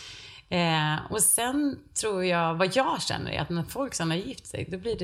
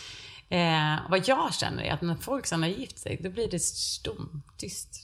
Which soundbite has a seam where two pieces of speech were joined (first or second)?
second